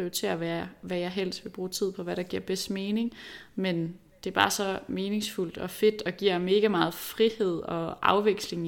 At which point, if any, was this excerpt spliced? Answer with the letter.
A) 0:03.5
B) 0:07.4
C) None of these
C